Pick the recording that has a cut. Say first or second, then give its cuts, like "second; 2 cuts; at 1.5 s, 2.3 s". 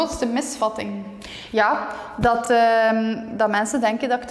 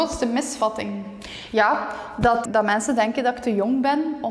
second; 1 cut; at 2.5 s